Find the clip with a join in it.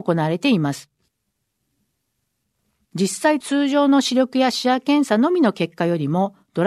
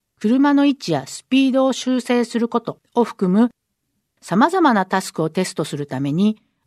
first; 1 cut; at 2.8 s

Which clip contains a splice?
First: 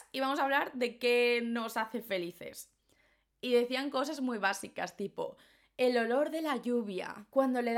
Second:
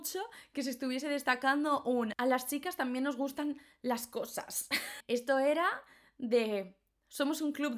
second; 1 cut; at 5.0 s

